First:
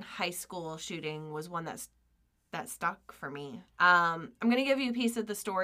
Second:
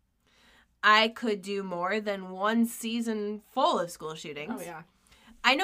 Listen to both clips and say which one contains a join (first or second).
first